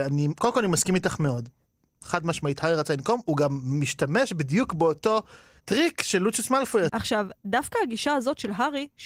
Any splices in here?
yes; 1 cut; at 6.9 s

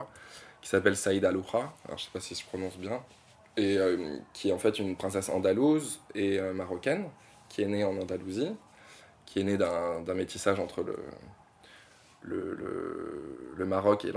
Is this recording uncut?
yes; 0 cuts

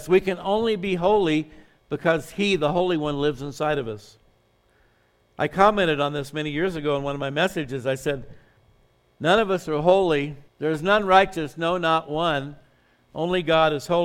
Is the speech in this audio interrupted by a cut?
yes; 1 cut; at 10.5 s

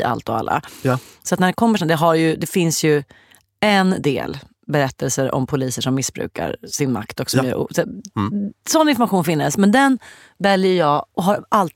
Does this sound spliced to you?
no; 0 cuts

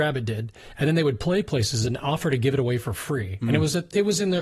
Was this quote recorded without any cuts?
yes; 0 cuts

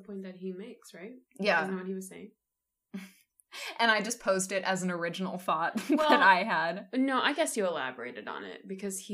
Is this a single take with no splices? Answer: no; 2 cuts; at 1.3 s, 2.7 s

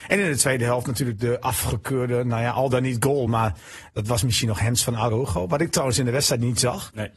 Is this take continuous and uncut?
yes; 0 cuts

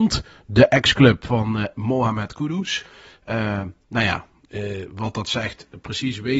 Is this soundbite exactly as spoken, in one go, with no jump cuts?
yes; 0 cuts

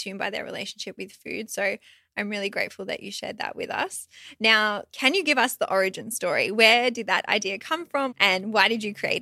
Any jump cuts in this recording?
yes; 2 cuts; at 4.9 s, 8.1 s

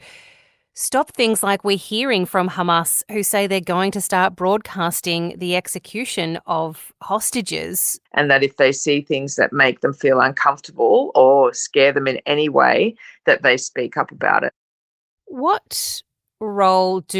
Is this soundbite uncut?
no; 1 cut; at 8.0 s

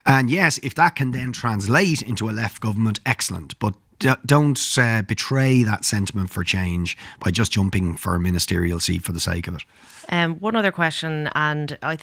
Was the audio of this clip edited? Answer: yes; 1 cut; at 3.9 s

